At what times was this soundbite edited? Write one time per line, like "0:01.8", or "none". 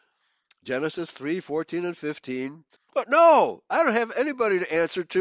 0:02.8